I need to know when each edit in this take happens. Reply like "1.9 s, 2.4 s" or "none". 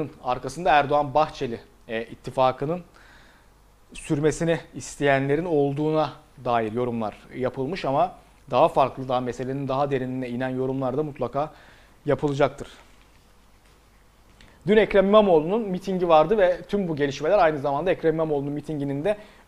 none